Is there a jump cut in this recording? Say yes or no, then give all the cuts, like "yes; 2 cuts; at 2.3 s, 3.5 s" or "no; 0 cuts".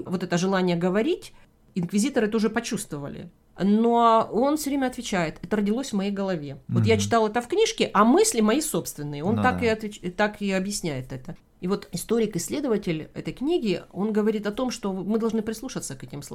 no; 0 cuts